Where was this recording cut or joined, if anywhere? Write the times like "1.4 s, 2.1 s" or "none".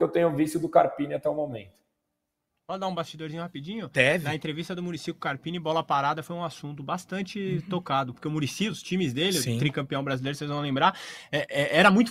none